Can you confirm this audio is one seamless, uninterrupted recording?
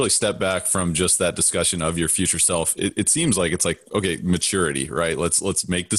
yes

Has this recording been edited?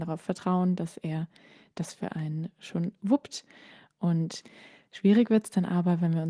no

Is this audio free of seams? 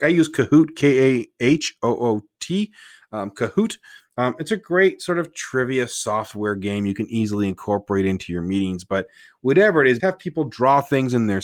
no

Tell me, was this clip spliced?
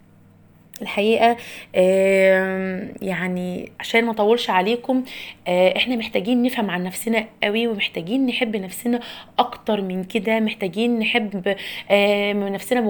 yes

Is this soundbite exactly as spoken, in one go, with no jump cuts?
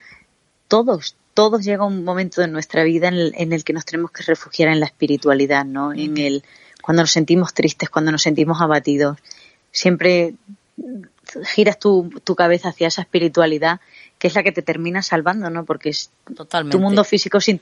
yes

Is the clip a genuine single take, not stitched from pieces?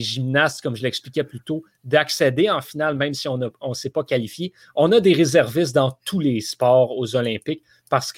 yes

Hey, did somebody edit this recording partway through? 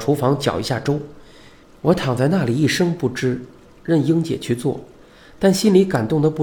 yes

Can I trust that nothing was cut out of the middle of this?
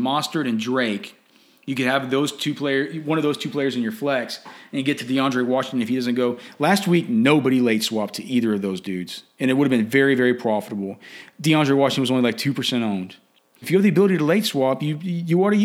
no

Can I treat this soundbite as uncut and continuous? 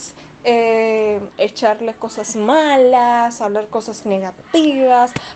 no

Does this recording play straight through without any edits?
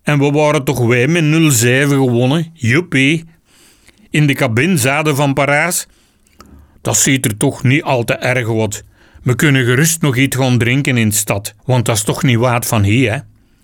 no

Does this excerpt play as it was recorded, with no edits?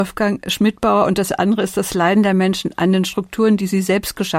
yes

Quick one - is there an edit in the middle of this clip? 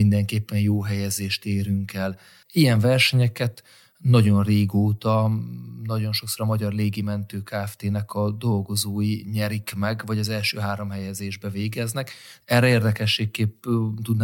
yes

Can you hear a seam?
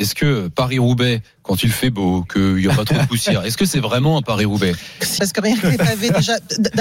yes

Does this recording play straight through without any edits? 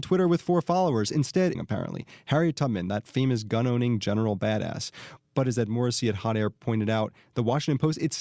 no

